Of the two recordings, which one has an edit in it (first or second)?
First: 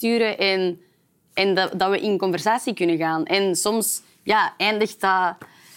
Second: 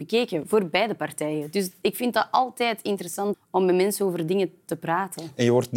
second